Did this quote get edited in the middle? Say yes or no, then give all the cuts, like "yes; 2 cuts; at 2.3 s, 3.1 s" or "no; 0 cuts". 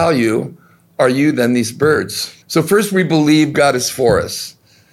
yes; 1 cut; at 2.4 s